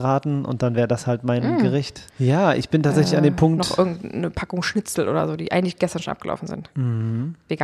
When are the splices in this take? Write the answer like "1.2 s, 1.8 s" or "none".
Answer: 2.1 s